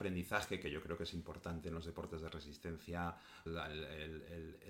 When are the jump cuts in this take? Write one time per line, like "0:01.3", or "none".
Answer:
0:03.5